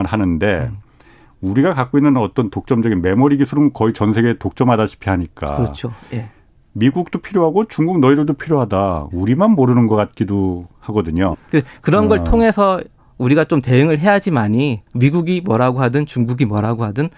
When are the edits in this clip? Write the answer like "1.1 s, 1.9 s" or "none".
9.1 s, 11.3 s, 14.9 s